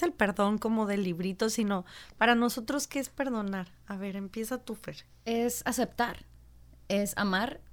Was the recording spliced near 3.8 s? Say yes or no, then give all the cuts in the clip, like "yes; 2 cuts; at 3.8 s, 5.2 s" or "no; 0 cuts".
no; 1 cut; at 5.1 s